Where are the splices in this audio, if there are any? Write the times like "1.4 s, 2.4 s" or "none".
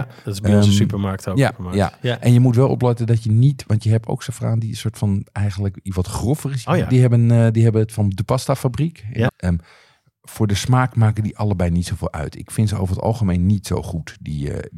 1.5 s, 6.6 s, 9.3 s